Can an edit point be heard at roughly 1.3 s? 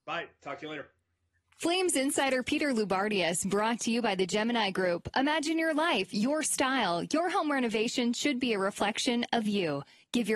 no; 0 cuts

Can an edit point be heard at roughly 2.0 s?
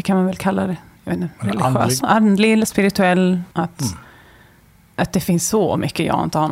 yes; 2 cuts; at 2.0 s, 3.5 s

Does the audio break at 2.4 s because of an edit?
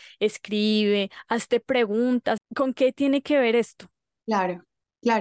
yes; 2 cuts; at 2.4 s, 4.2 s

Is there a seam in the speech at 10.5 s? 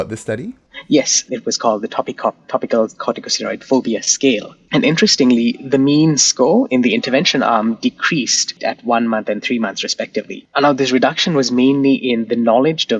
no; 1 cut; at 1.3 s

